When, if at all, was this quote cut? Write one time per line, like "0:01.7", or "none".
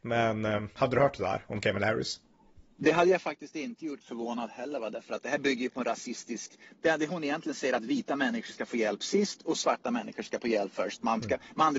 0:04.0